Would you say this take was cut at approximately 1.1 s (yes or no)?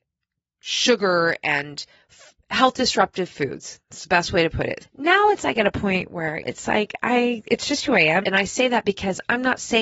no